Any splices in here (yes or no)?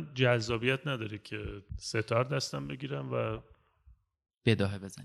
yes